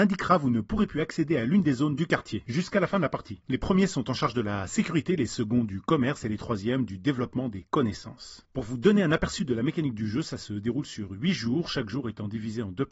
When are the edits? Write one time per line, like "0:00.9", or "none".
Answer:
0:03.4
0:08.5